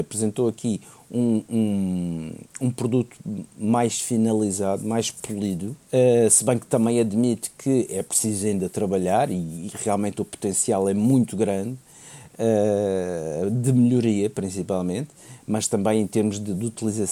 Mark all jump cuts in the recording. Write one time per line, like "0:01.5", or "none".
0:05.8